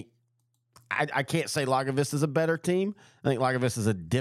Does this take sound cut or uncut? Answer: uncut